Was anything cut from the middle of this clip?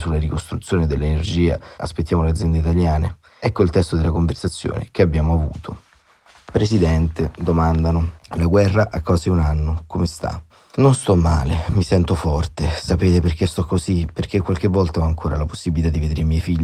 yes; 1 cut; at 1.8 s

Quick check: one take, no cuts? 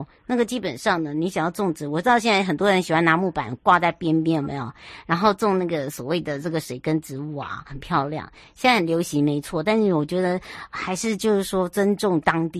no; 2 cuts; at 7.7 s, 10.7 s

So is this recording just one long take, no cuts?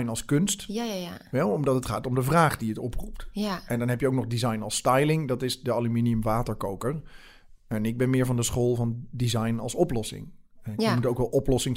yes; 0 cuts

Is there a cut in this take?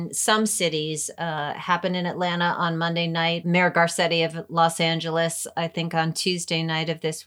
no; 0 cuts

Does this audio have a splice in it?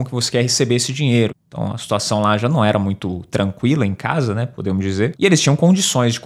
yes; 2 cuts; at 1.3 s, 5.1 s

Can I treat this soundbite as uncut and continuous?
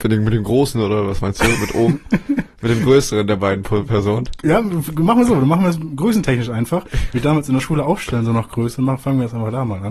yes; 0 cuts

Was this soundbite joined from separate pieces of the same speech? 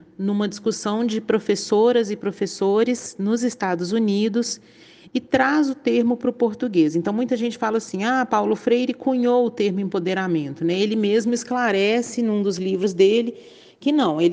no; 0 cuts

